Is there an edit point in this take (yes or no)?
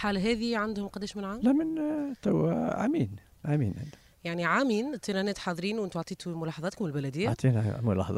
yes